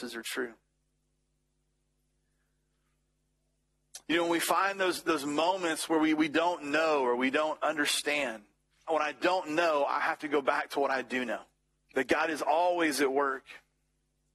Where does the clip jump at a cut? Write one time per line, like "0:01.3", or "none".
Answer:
0:08.9
0:11.8